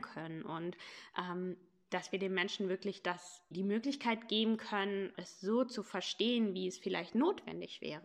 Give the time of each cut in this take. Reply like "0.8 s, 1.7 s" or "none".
3.5 s, 5.1 s